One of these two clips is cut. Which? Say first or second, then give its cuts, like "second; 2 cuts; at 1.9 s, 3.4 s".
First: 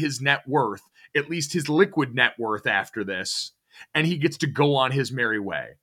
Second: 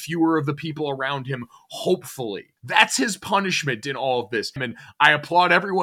second; 2 cuts; at 2.6 s, 4.6 s